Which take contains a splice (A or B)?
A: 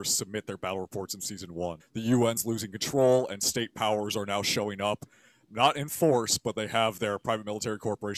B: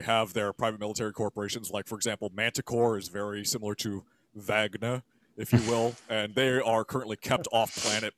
A